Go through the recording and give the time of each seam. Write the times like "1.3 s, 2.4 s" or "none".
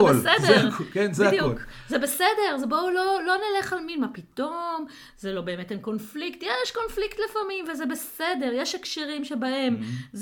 none